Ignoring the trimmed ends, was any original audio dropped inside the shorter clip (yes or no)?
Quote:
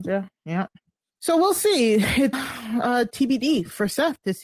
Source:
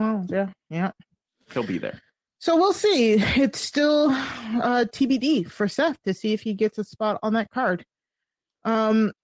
yes